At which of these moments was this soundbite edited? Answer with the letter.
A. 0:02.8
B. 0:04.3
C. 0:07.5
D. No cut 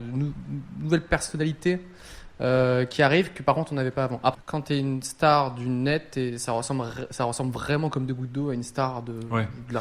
B